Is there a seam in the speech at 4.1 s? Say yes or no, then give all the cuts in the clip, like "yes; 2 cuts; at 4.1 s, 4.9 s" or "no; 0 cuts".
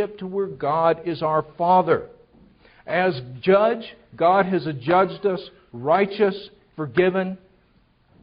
no; 2 cuts; at 2.7 s, 6.7 s